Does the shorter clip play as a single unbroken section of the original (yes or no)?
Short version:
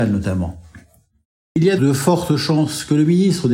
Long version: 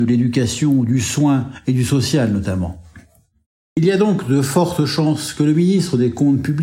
no